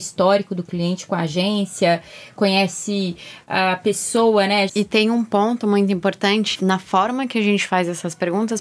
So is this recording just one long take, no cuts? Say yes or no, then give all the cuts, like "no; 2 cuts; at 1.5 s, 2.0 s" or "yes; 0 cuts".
no; 2 cuts; at 4.7 s, 6.6 s